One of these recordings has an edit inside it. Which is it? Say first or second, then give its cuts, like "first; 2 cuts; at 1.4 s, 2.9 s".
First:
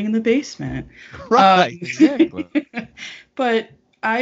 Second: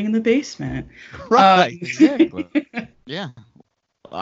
second; 1 cut; at 2.9 s